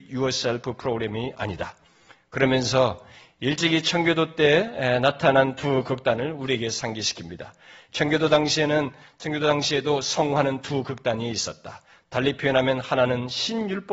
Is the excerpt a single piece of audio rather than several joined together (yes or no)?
yes